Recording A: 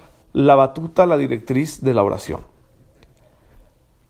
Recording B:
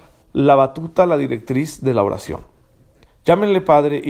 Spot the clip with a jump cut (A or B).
B